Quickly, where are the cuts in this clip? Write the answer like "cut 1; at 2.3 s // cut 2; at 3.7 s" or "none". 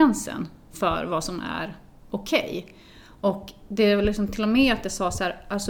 none